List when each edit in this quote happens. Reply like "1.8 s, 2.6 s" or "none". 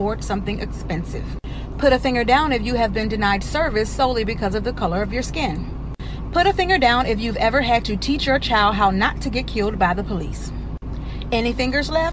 1.7 s